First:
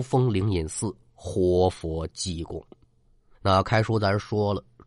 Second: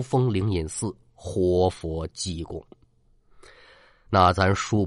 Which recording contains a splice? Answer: first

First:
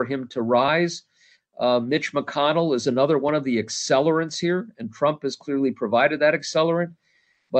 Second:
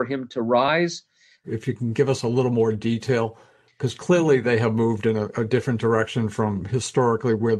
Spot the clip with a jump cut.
second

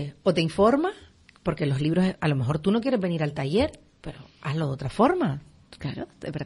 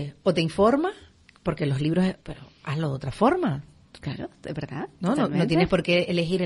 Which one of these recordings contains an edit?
second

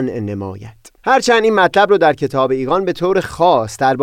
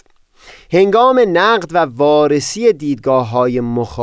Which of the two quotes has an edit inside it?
first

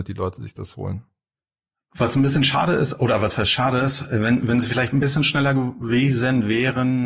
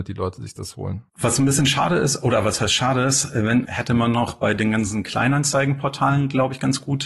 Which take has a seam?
second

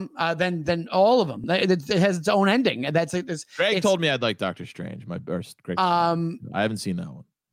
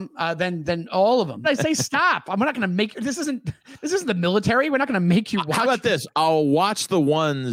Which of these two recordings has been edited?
second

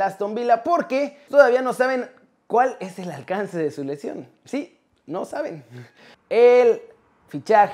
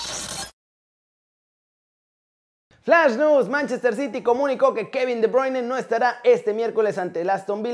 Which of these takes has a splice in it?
first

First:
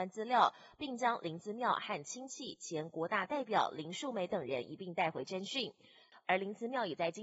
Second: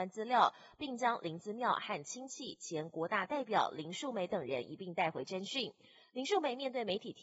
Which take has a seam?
first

